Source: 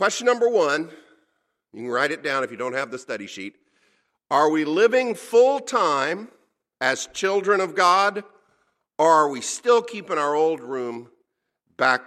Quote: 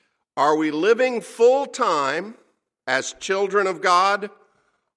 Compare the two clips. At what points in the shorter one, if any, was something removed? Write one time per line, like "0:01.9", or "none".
none

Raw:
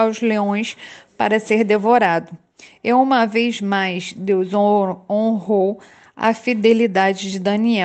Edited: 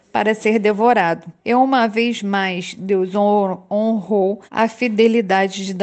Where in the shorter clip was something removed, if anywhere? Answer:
0:01.4
0:04.5

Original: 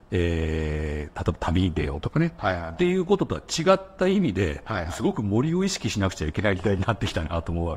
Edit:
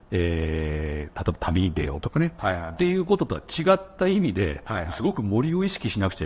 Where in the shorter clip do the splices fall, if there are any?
none

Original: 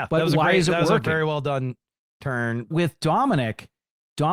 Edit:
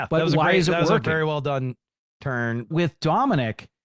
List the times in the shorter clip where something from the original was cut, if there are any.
none

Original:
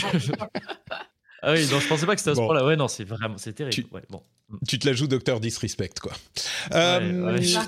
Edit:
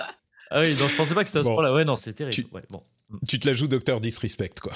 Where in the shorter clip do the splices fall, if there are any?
0:02.0

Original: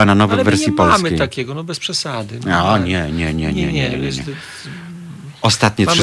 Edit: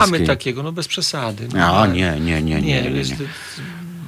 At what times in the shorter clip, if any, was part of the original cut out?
0:02.6

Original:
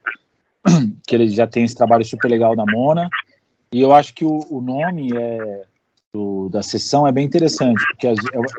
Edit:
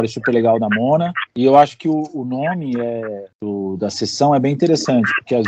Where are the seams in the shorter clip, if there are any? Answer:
0:01.3
0:03.3

